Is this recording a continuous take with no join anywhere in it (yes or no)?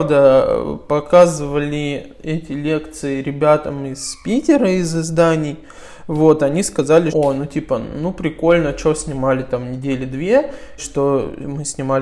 no